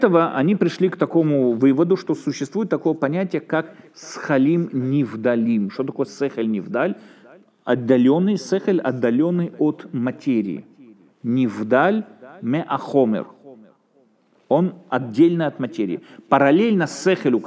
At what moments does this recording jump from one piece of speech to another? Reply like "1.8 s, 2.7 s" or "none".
none